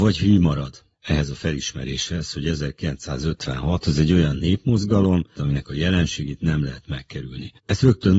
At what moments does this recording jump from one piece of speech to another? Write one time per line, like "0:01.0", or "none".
0:00.9
0:05.3